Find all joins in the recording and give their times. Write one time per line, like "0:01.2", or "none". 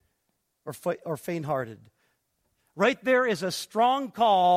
none